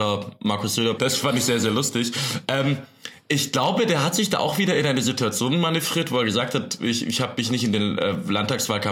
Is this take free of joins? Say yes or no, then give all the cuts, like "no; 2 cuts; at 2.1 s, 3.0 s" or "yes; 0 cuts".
no; 1 cut; at 1.0 s